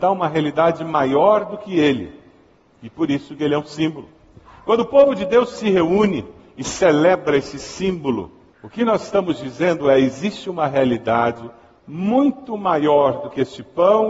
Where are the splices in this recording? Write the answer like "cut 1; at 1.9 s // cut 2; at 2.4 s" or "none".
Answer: cut 1; at 8.5 s